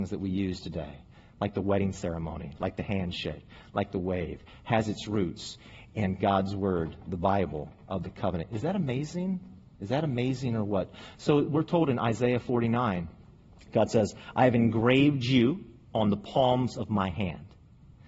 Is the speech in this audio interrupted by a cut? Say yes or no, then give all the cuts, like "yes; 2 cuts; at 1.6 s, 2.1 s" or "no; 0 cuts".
no; 0 cuts